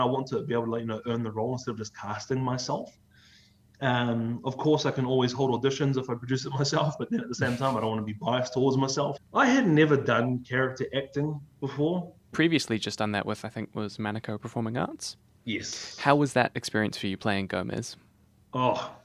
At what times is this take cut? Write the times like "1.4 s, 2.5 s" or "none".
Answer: 9.2 s, 12.3 s